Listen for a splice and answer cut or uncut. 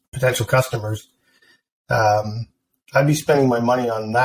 uncut